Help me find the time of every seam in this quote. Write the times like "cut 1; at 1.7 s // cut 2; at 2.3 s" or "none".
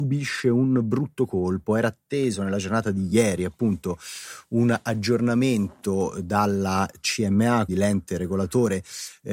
cut 1; at 7.7 s